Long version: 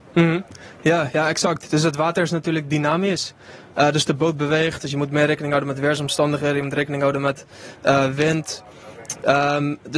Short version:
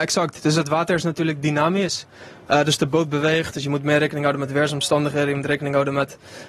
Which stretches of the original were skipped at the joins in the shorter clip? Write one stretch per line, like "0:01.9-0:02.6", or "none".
none

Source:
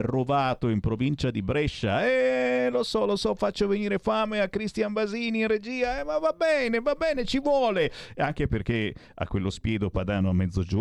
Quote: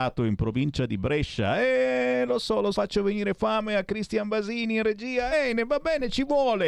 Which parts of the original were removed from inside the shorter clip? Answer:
0:03.2-0:03.4
0:06.0-0:06.5

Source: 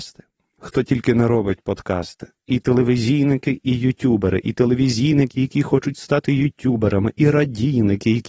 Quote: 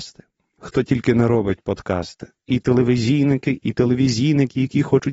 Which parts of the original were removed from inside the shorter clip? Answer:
0:03.6-0:04.4

